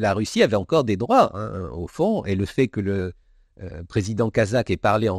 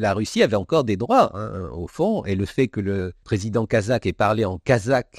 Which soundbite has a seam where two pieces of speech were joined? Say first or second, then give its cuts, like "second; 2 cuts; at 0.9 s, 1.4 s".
second; 1 cut; at 3.2 s